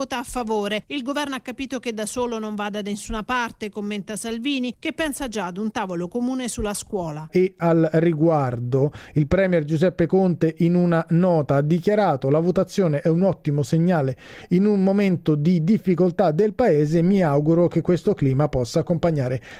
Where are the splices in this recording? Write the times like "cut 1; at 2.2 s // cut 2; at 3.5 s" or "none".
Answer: cut 1; at 7.3 s